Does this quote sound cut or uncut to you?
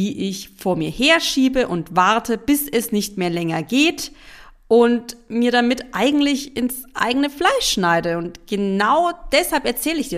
uncut